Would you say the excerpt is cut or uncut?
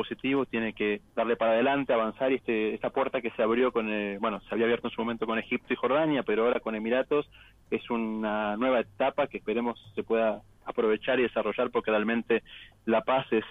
cut